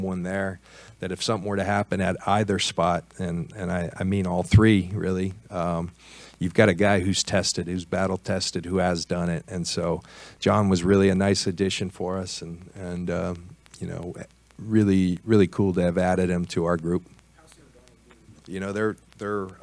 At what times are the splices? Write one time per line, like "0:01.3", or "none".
0:12.7
0:18.4